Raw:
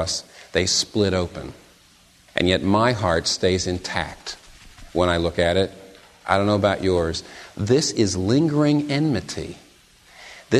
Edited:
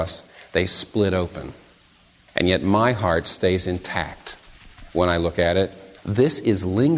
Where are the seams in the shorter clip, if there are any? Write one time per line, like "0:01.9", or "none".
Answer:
0:06.0